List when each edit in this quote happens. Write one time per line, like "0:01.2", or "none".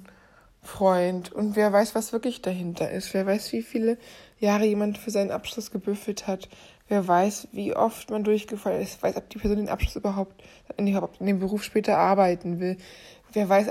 none